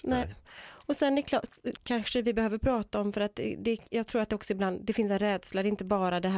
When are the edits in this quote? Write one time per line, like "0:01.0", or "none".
0:01.8